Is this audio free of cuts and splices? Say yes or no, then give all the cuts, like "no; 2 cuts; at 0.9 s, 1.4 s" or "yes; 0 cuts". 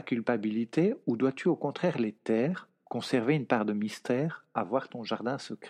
yes; 0 cuts